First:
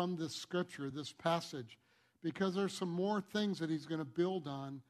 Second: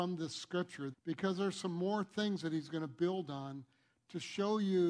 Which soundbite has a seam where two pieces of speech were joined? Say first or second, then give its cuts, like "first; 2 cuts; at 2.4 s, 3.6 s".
second; 1 cut; at 0.9 s